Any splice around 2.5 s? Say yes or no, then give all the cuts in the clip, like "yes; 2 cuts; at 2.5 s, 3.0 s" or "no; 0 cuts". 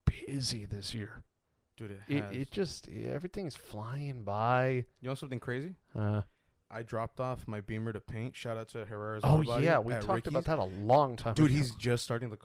no; 1 cut; at 6.6 s